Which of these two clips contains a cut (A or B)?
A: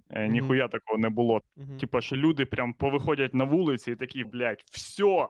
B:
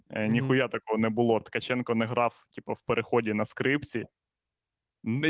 A